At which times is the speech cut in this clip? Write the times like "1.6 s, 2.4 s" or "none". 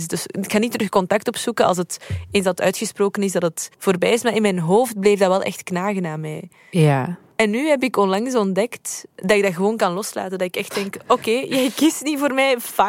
none